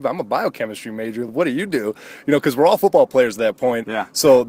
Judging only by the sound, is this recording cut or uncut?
uncut